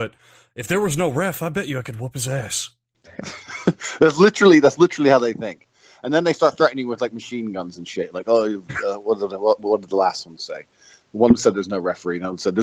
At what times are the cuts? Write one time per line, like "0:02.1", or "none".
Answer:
none